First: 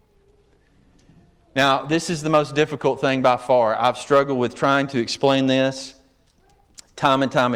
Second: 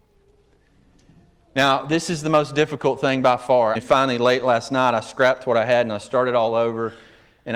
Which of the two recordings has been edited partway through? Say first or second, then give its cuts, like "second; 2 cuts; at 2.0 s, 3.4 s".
second; 1 cut; at 3.8 s